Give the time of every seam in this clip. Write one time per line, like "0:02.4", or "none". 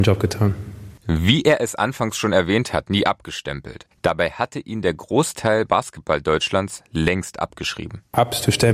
0:02.8